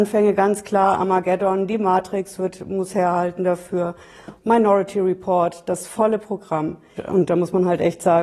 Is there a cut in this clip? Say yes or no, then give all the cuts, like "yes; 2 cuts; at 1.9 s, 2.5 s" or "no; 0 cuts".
yes; 2 cuts; at 4.4 s, 7.0 s